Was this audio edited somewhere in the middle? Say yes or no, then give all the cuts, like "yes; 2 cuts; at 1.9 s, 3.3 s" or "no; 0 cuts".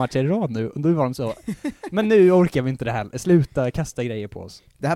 no; 0 cuts